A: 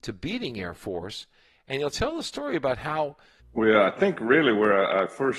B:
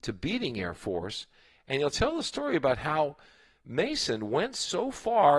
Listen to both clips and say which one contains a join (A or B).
A